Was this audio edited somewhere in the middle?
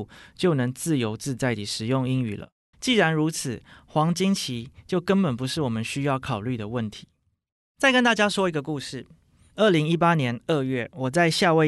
yes; 1 cut; at 2.7 s

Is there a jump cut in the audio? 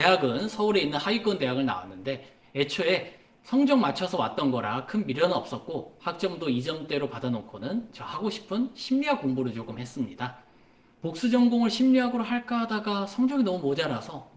no; 0 cuts

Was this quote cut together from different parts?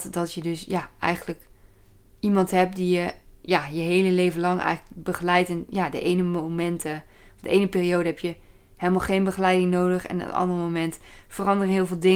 no; 0 cuts

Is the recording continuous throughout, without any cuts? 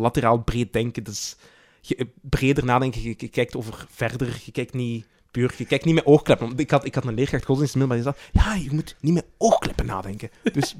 yes; 0 cuts

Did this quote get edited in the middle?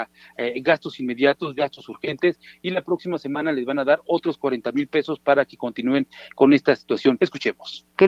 yes; 1 cut; at 7.2 s

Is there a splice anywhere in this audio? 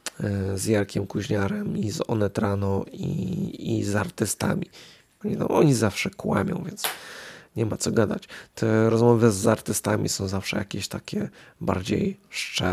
yes; 1 cut; at 5.2 s

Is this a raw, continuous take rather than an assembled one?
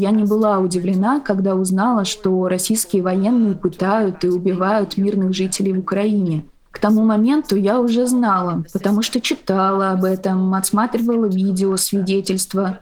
yes; 0 cuts

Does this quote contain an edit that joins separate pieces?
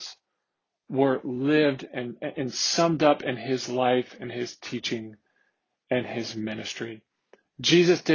no; 0 cuts

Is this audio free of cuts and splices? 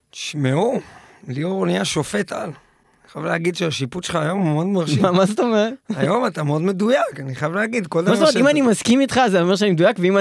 yes; 0 cuts

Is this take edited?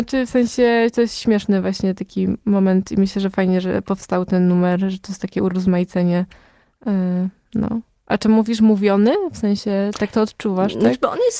no; 0 cuts

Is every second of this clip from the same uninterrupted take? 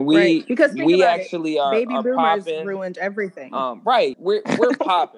no; 1 cut; at 4.1 s

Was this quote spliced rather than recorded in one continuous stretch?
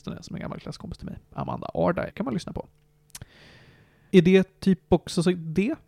yes; 2 cuts; at 2.1 s, 4.1 s

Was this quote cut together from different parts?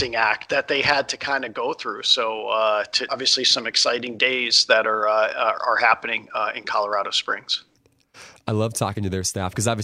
yes; 1 cut; at 3.1 s

